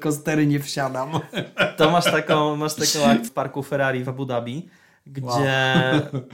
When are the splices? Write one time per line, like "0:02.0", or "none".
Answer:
0:03.3